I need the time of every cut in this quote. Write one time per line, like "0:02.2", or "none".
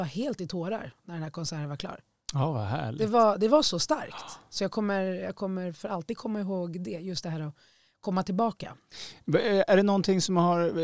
none